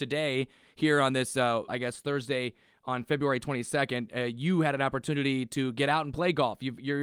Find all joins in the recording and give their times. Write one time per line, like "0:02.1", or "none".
0:01.7